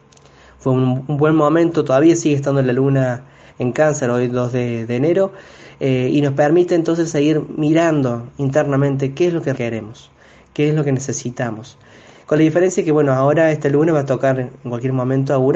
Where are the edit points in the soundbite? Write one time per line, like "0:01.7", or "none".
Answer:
0:09.6